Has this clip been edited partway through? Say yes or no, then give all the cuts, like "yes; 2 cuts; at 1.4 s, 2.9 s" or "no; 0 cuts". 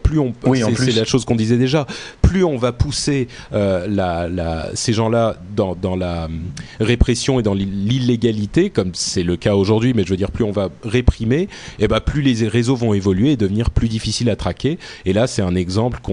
no; 0 cuts